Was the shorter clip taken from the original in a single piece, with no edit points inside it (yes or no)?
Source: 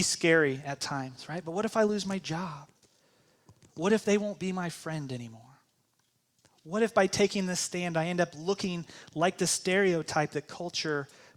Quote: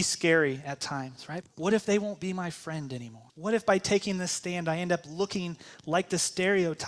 no